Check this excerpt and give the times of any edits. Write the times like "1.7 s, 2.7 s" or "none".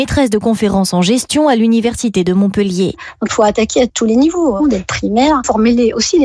2.9 s, 4.6 s